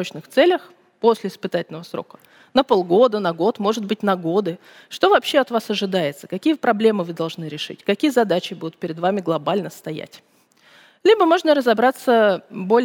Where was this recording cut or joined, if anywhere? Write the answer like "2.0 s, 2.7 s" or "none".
none